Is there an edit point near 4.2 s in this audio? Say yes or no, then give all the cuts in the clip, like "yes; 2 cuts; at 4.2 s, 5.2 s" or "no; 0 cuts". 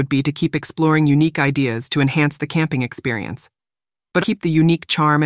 yes; 1 cut; at 4.2 s